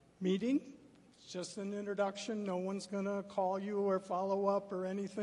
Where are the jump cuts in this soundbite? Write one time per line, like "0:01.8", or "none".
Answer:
none